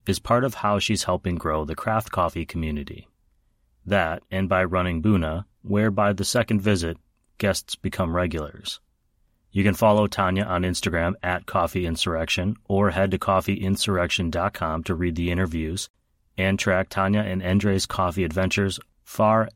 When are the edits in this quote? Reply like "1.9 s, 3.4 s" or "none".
none